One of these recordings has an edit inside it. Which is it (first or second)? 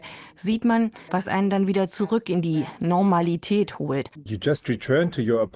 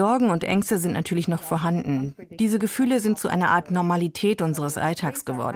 first